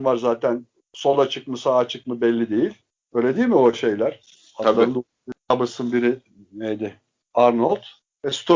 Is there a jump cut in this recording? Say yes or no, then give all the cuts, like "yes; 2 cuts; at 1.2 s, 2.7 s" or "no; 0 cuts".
no; 0 cuts